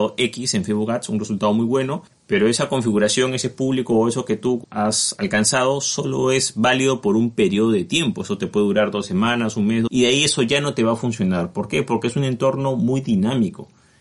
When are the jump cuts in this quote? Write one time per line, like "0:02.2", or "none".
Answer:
none